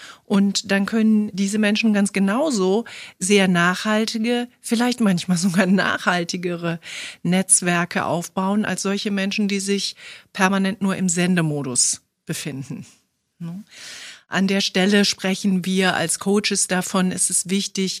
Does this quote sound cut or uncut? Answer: uncut